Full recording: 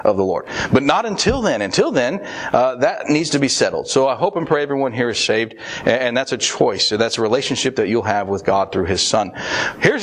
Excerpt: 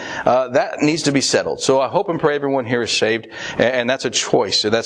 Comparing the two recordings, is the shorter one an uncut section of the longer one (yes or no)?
yes